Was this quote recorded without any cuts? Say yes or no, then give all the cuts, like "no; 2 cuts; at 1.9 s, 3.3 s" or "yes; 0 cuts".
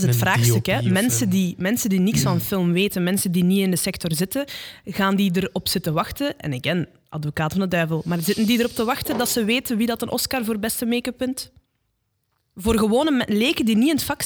yes; 0 cuts